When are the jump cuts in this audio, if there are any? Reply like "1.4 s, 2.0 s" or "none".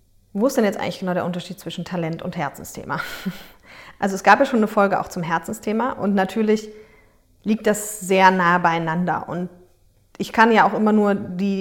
none